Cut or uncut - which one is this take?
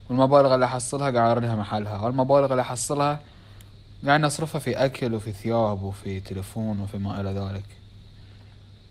uncut